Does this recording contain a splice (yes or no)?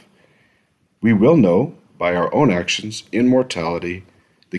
yes